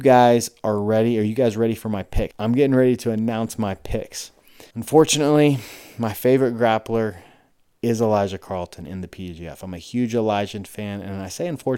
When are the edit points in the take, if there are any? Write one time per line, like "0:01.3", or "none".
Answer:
0:02.3
0:04.7